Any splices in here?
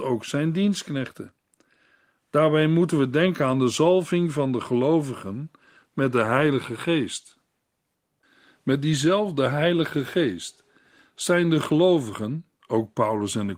no; 0 cuts

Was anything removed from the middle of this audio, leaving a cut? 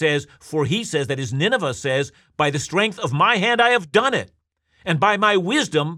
no; 0 cuts

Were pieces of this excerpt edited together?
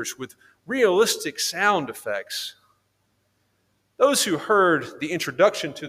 no; 0 cuts

